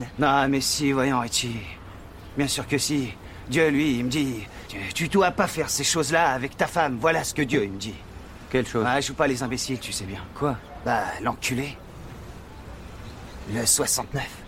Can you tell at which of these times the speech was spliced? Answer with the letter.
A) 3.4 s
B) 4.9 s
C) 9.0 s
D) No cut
B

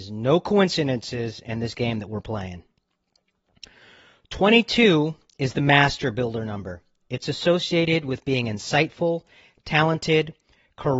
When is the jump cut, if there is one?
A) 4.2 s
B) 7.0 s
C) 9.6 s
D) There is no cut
D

